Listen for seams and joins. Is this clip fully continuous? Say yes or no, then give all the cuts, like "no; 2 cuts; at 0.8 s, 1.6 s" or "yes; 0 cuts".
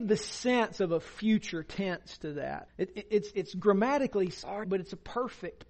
no; 2 cuts; at 2.7 s, 4.6 s